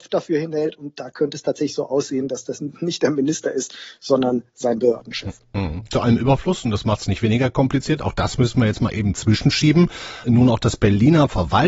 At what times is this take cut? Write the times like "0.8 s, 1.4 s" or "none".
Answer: 10.2 s